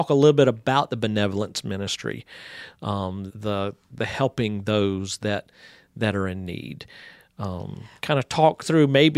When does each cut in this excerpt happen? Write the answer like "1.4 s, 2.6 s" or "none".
3.3 s

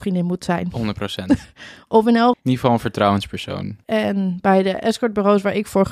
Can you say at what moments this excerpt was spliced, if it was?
2.3 s, 3.8 s

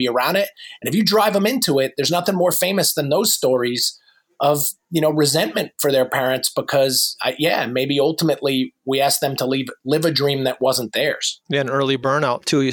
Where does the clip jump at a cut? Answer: none

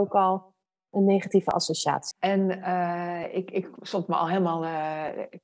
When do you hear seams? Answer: 2.1 s

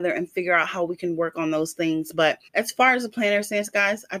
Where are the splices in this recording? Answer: 2.5 s

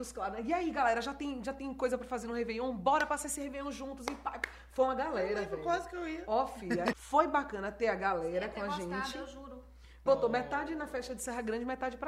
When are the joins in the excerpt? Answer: 6.9 s, 10.1 s

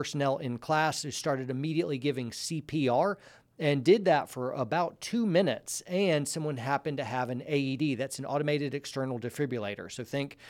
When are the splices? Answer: none

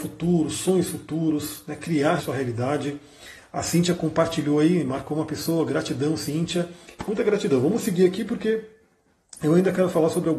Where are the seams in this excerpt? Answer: 2.2 s, 7.0 s

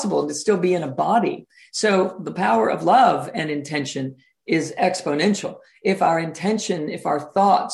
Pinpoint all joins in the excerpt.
none

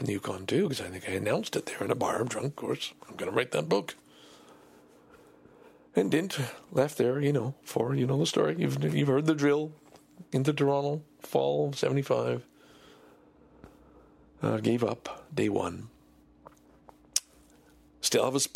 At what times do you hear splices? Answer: none

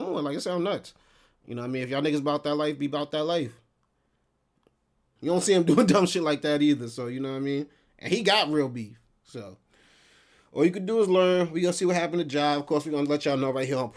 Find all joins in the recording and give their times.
5.2 s

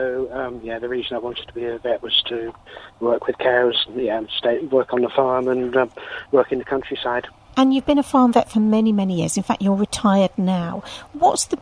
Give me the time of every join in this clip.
7.5 s

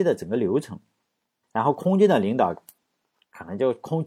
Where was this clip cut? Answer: 1.4 s

